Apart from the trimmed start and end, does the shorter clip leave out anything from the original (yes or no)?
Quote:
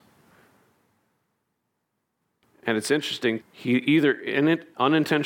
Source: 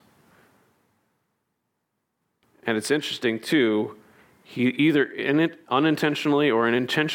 yes